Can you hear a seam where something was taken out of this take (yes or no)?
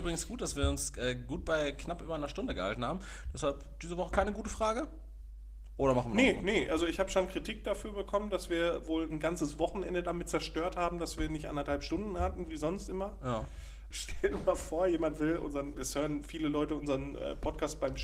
yes